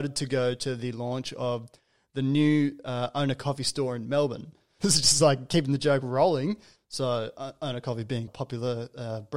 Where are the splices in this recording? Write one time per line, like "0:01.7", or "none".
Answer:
0:04.8
0:06.8
0:08.3